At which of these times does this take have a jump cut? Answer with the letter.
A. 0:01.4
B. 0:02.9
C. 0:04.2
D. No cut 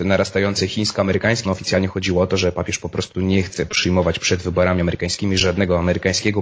A